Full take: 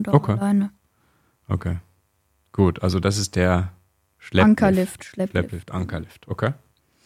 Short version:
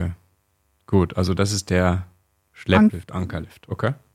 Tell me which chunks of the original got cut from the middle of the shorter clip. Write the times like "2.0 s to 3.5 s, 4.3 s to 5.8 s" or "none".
4.6 s to 5.5 s